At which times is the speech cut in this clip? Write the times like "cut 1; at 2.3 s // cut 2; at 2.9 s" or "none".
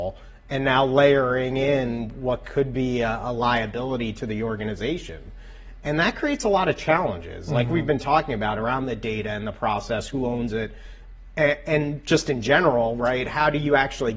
none